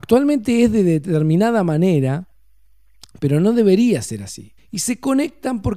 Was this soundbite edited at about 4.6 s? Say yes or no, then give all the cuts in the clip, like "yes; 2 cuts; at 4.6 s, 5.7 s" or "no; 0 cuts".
yes; 1 cut; at 4.6 s